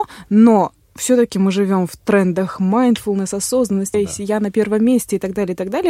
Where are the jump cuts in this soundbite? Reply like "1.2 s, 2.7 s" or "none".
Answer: 3.9 s